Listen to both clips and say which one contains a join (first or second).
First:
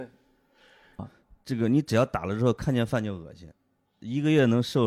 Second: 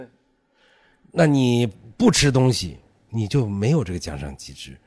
first